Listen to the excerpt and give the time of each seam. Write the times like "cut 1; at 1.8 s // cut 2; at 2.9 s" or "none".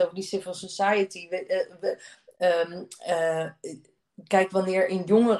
none